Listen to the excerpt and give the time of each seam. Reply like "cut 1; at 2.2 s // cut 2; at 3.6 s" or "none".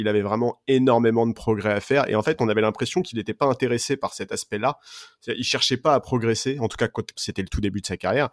cut 1; at 7.1 s

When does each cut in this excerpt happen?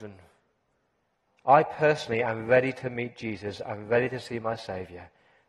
cut 1; at 1.3 s

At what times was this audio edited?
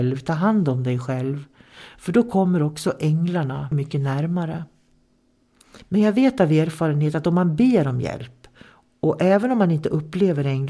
cut 1; at 3.7 s // cut 2; at 5.8 s

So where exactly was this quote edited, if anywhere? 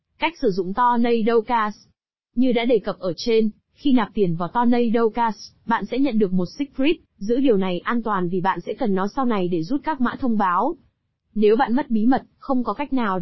cut 1; at 7.0 s

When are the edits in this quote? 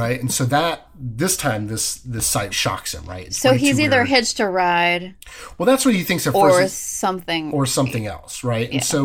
cut 1; at 2.5 s

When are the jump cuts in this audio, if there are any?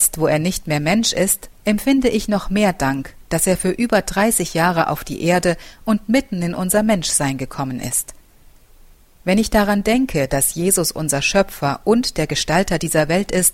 cut 1; at 1.5 s

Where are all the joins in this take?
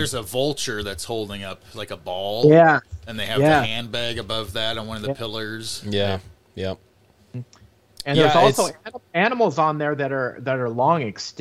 none

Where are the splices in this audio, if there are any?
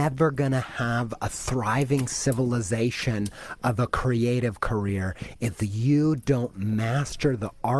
none

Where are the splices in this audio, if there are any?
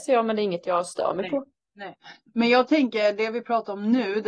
none

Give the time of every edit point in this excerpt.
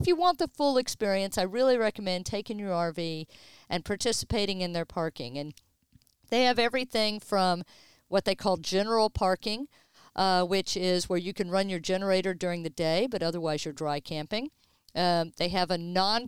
none

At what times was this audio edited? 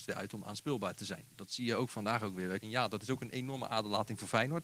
cut 1; at 2.6 s

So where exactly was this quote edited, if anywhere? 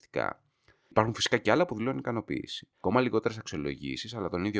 none

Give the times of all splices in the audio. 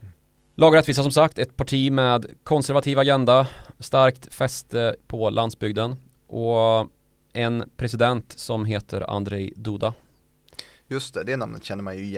none

